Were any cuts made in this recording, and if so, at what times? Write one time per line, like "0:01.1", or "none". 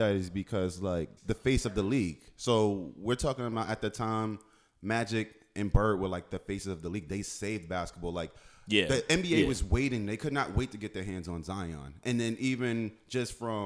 0:01.2